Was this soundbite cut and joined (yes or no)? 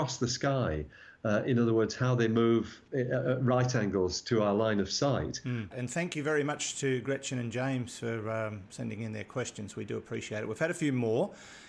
yes